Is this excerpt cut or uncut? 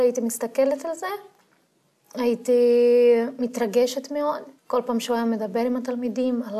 cut